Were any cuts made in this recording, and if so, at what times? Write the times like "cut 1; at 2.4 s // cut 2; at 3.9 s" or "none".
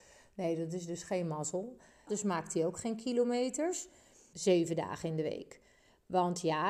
cut 1; at 2.1 s // cut 2; at 4.3 s